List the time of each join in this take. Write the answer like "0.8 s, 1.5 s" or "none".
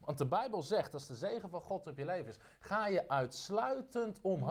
none